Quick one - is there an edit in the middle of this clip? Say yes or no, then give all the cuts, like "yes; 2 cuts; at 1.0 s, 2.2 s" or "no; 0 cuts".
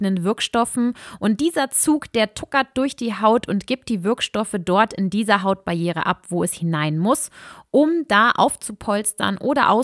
no; 0 cuts